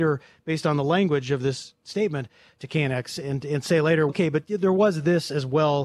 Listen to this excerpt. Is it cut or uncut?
cut